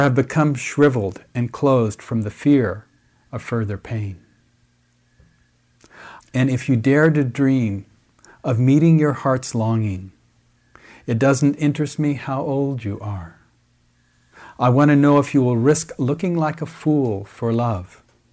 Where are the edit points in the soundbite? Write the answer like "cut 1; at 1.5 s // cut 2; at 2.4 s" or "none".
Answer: cut 1; at 6.2 s